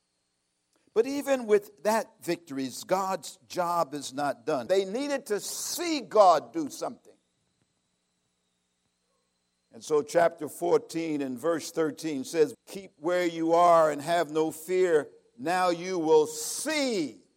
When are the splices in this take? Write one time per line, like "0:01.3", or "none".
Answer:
0:04.7
0:12.5